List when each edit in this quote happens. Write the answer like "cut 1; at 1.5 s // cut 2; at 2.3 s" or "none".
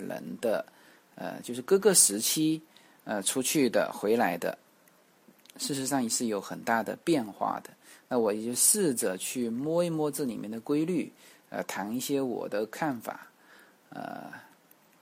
none

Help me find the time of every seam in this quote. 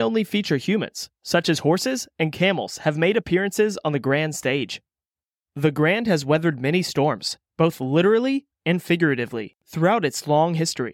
cut 1; at 1.2 s

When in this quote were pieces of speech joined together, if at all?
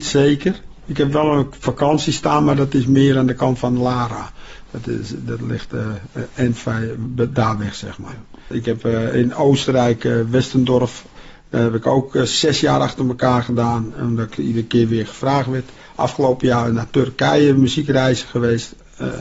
cut 1; at 8.5 s

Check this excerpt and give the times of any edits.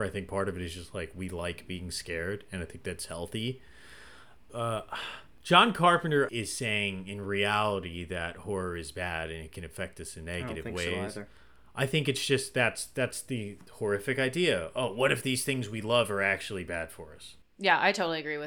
cut 1; at 6.3 s

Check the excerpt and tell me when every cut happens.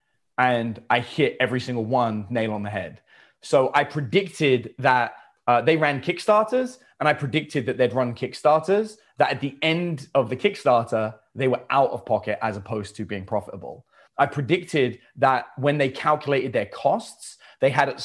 cut 1; at 14.1 s

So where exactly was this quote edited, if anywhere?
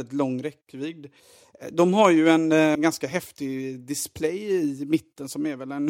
cut 1; at 2.8 s

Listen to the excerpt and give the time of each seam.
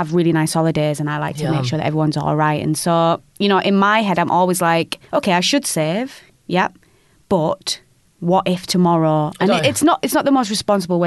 cut 1; at 5.1 s

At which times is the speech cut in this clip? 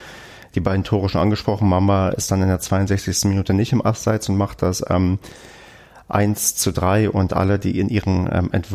none

